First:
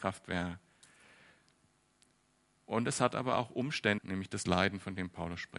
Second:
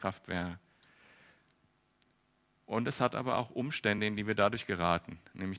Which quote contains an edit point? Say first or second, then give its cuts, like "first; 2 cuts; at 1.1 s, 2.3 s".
first; 1 cut; at 4.0 s